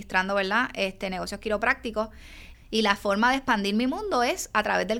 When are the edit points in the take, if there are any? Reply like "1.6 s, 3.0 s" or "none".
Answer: 2.5 s